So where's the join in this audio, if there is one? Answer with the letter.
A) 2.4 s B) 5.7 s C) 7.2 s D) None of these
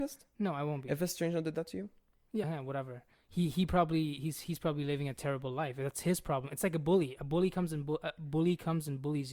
A